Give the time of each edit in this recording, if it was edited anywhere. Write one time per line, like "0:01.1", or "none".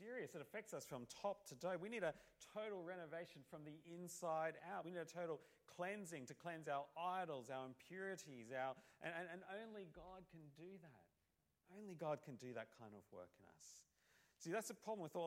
none